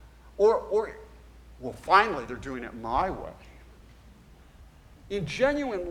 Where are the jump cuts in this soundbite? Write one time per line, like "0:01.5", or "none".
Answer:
none